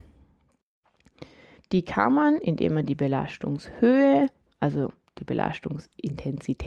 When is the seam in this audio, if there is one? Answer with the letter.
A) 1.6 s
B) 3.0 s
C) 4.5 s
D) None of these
A